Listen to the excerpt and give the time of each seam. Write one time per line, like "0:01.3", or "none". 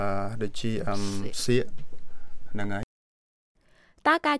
none

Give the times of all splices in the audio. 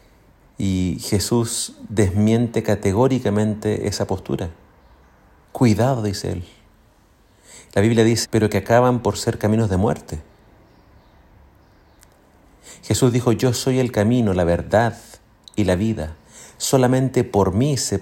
0:08.2

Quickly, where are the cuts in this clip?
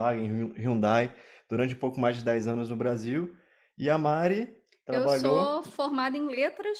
none

